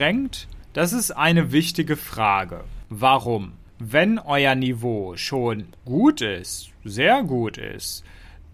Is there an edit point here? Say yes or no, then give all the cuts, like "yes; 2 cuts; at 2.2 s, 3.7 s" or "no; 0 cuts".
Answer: no; 0 cuts